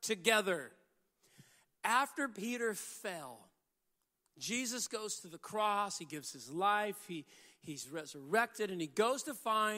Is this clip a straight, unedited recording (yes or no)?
yes